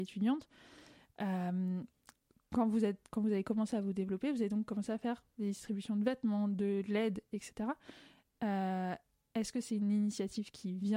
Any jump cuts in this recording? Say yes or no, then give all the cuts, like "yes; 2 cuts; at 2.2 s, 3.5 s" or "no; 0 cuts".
no; 0 cuts